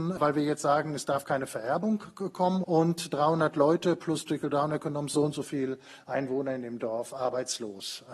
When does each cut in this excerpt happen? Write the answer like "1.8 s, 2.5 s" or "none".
2.6 s